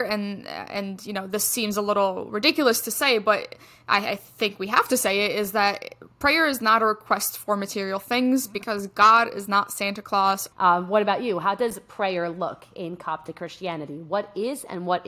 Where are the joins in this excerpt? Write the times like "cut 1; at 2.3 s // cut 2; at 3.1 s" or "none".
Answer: cut 1; at 10.5 s